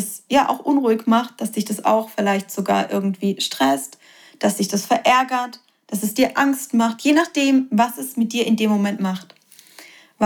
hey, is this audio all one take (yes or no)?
yes